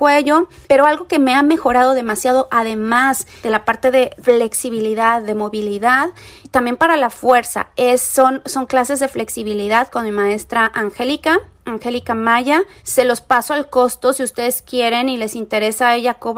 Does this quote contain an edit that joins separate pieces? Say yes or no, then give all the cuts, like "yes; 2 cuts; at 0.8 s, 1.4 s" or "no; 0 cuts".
no; 0 cuts